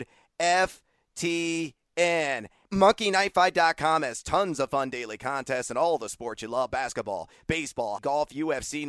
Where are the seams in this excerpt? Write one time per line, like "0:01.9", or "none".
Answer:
0:02.7
0:08.0